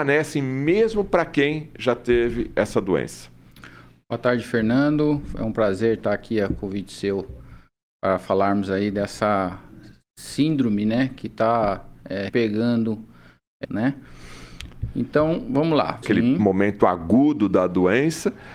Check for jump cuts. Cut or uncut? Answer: cut